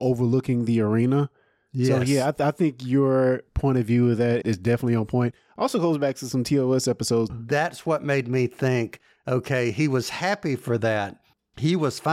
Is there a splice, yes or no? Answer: yes